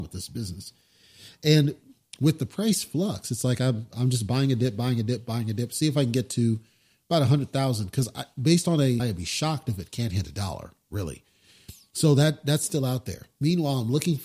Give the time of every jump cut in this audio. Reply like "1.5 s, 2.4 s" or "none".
9.0 s